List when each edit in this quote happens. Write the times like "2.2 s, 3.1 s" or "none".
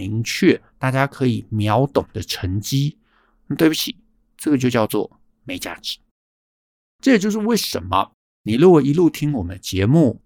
none